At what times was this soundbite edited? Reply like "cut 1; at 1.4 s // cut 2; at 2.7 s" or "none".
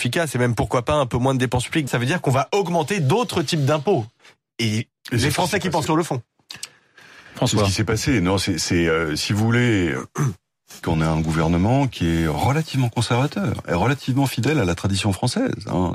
cut 1; at 1.9 s // cut 2; at 5.9 s // cut 3; at 10.8 s